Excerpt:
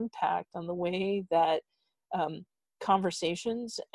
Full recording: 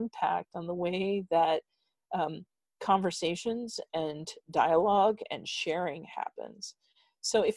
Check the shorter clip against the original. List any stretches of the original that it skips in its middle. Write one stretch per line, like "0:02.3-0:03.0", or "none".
none